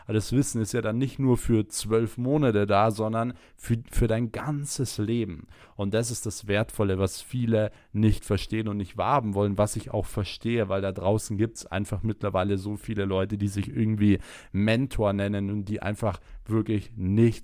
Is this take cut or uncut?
uncut